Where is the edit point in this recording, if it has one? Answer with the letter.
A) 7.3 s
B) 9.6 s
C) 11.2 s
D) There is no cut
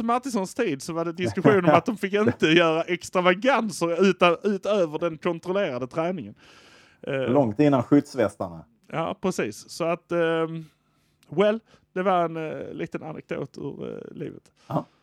D